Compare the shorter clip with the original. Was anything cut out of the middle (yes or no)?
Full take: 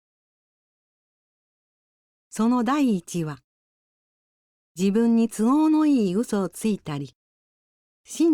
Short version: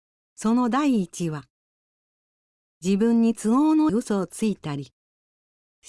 yes